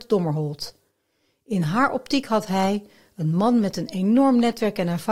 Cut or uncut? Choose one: uncut